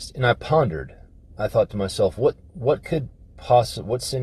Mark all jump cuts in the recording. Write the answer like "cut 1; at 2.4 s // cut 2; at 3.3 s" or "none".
none